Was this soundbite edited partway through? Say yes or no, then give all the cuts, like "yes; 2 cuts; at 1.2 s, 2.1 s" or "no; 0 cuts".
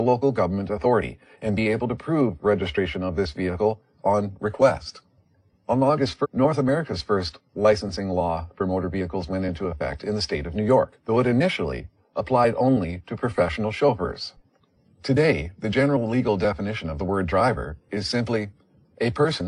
yes; 2 cuts; at 6.2 s, 11.0 s